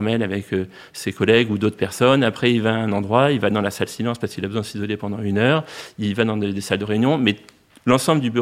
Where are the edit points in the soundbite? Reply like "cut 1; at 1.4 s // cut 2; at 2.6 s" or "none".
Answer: none